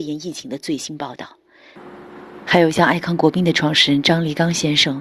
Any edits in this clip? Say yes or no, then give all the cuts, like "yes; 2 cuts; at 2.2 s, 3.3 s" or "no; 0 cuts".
no; 0 cuts